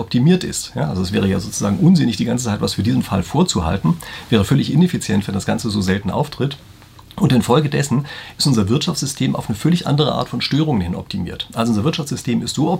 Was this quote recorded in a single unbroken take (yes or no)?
yes